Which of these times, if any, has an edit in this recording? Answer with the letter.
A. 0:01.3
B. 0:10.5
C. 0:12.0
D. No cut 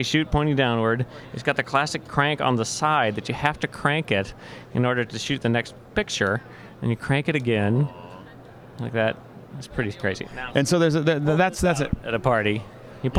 B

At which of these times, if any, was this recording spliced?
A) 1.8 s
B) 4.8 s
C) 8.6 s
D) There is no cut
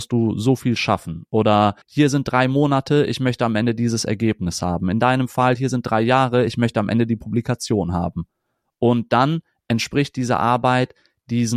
A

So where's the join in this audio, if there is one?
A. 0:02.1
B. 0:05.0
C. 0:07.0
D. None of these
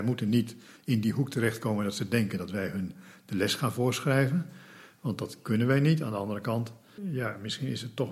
C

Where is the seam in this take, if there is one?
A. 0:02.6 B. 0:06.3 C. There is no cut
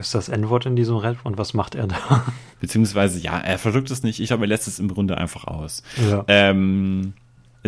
A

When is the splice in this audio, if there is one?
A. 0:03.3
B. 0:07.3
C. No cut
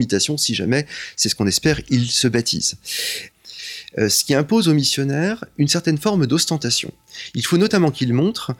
A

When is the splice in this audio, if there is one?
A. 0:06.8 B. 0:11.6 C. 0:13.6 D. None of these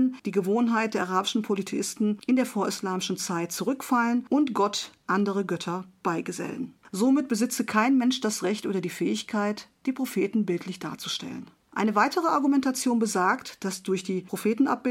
A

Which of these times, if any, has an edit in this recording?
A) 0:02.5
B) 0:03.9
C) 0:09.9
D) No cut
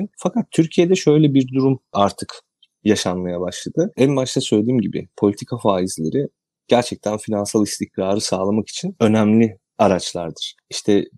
B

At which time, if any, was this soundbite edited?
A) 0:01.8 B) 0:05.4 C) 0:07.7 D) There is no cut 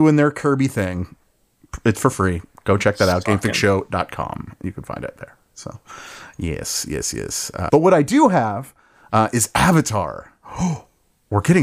C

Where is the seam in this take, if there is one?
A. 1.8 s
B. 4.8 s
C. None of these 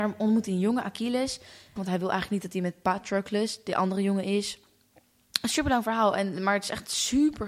A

